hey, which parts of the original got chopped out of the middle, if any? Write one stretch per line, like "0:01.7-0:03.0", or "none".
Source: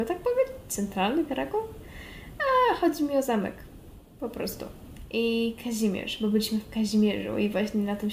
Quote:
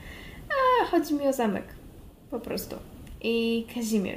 none

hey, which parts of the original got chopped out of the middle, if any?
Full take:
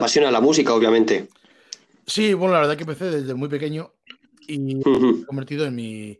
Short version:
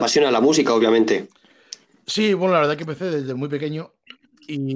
none

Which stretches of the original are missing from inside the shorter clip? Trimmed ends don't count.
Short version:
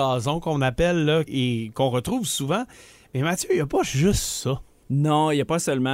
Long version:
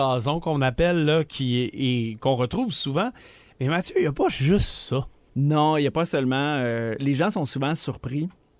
0:01.3-0:01.7

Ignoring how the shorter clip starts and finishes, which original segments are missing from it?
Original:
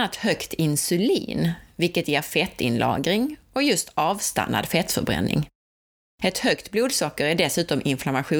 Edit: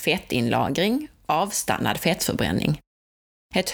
0:03.5-0:03.9

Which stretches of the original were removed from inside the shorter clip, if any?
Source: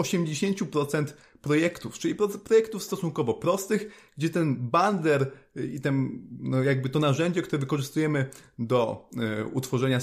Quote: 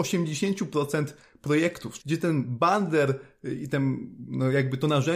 0:02.0-0:04.1

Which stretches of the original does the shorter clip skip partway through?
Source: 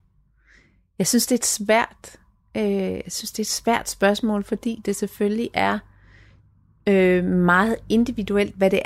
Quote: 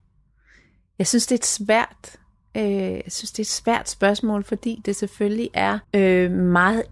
0:05.8-0:06.8

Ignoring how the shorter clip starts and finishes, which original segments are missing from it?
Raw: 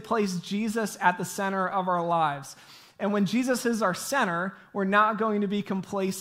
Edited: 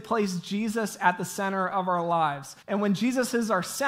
0:02.6-0:02.9

